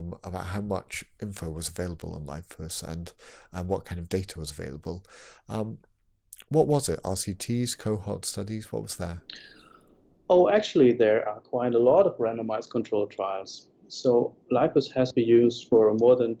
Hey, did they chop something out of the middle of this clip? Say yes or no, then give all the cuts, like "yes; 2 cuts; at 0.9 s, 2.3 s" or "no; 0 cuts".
no; 0 cuts